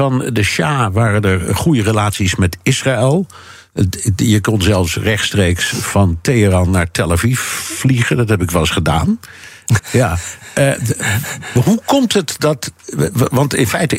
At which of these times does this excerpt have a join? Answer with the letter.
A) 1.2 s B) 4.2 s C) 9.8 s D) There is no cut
C